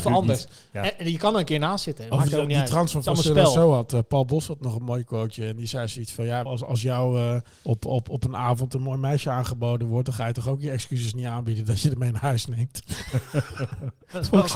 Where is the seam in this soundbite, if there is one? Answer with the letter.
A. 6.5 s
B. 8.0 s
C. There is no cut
A